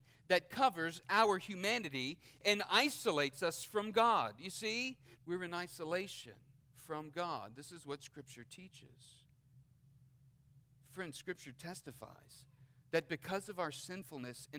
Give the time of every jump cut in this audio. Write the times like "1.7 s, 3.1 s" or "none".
5.2 s